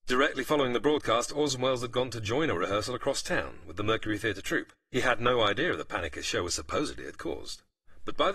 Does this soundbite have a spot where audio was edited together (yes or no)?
no